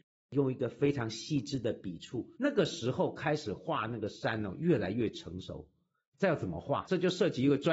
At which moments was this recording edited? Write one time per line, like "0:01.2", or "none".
none